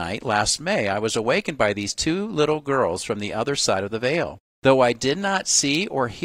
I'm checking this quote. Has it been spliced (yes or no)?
no